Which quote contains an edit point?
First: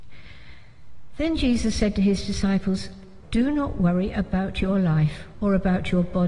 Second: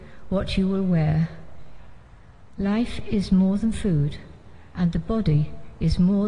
first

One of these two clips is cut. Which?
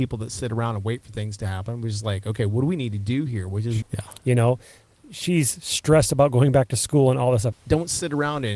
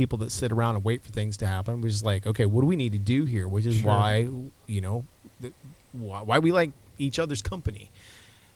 first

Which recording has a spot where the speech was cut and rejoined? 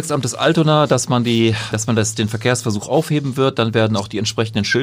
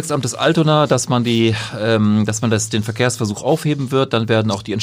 first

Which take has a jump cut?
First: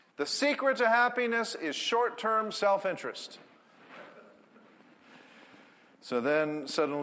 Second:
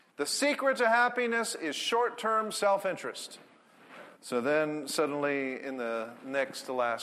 second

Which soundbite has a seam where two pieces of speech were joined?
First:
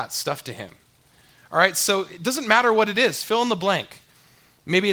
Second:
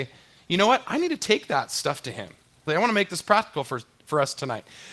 second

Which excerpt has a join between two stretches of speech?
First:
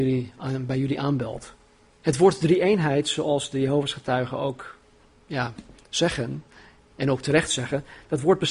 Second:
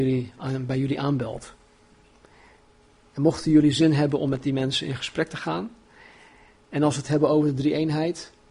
first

